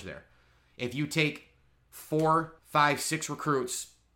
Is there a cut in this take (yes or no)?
yes